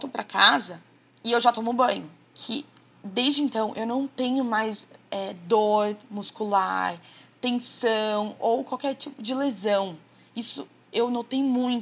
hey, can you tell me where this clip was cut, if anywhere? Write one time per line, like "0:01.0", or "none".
0:02.3